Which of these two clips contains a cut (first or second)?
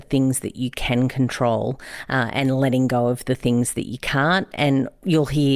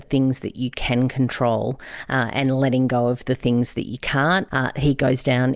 second